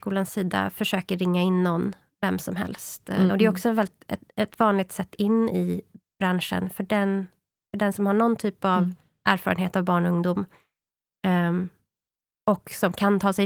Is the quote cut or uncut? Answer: cut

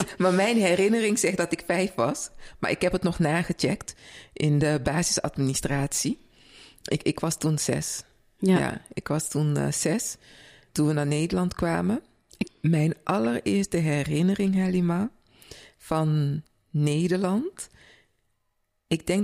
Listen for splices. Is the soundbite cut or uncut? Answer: cut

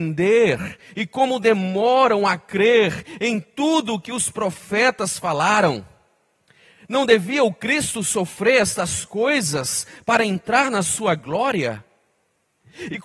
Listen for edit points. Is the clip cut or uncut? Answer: uncut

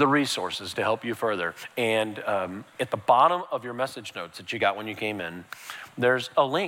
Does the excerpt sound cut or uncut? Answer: uncut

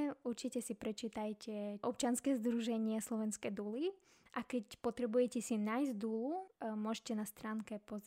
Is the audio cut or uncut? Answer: cut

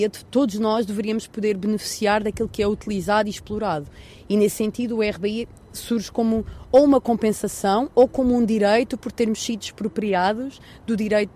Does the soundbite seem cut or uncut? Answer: uncut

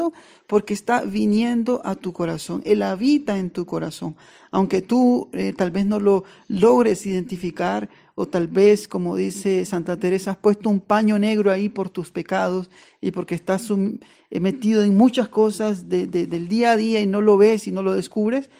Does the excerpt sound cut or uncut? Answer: uncut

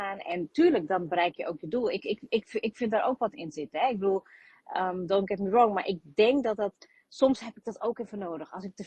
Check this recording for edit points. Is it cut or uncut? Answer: uncut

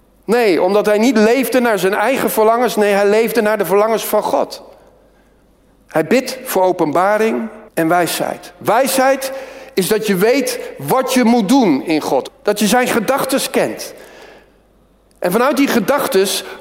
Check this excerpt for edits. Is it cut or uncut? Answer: cut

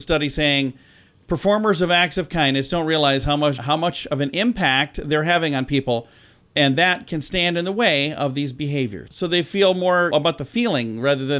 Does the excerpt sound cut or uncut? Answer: cut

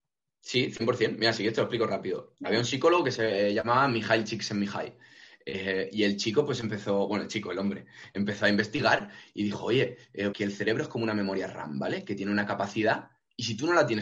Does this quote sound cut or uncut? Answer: cut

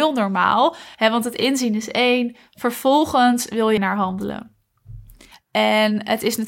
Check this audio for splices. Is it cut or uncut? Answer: cut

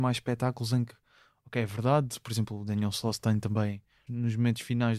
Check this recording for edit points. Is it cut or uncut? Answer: cut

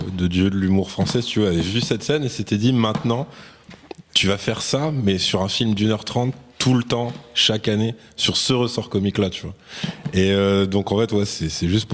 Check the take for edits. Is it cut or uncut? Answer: uncut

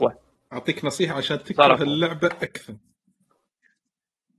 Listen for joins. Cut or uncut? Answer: uncut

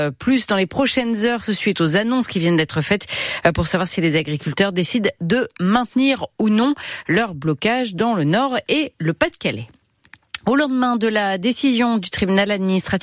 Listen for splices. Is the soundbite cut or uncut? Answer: uncut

